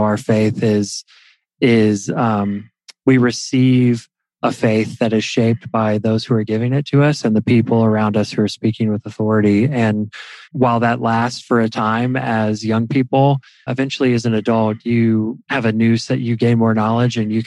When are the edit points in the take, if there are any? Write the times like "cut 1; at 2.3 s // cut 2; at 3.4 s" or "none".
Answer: cut 1; at 10.4 s // cut 2; at 13.7 s // cut 3; at 15.4 s